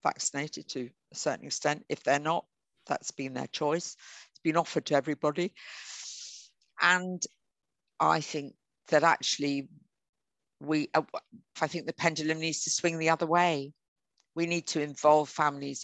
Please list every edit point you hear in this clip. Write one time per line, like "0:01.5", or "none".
0:11.6